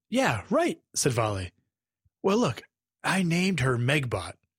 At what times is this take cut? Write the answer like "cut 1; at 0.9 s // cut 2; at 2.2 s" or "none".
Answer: cut 1; at 2.1 s